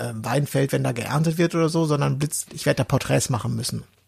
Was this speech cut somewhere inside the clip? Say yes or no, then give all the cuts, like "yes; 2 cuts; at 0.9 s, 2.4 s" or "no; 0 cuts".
yes; 1 cut; at 2.4 s